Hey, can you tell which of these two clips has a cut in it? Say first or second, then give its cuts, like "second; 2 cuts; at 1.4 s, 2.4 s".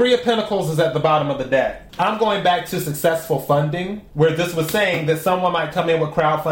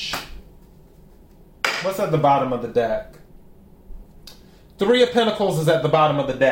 first; 2 cuts; at 1.9 s, 4.1 s